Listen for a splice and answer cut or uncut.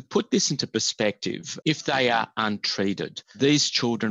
cut